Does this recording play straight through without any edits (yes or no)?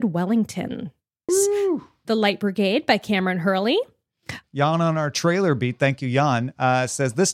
no